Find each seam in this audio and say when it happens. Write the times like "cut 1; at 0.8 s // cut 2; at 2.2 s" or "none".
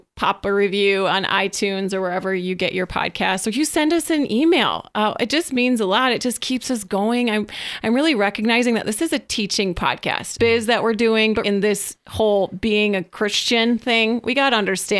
cut 1; at 10.4 s // cut 2; at 11.4 s